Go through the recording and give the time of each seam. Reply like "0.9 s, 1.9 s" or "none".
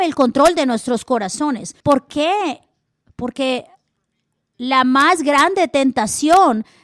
1.8 s